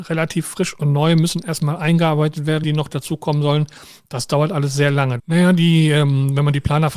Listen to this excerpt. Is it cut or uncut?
cut